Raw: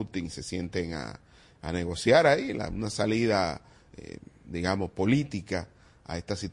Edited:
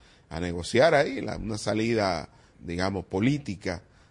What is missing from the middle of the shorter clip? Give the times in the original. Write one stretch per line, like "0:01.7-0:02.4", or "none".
0:03.8-0:04.4